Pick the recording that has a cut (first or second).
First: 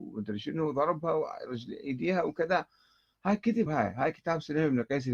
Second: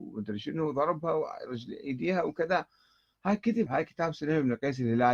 second